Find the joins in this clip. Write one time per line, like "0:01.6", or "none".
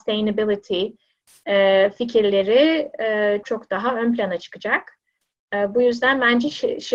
0:03.4